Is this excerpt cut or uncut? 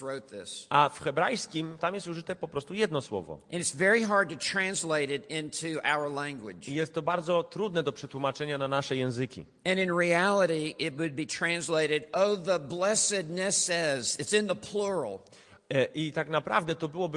cut